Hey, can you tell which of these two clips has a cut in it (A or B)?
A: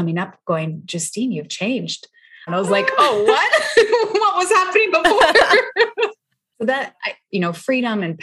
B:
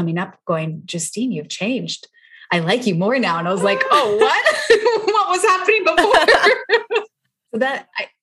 A